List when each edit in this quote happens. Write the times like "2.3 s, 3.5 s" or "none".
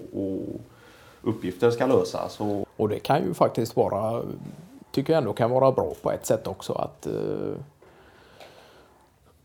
2.6 s, 4.8 s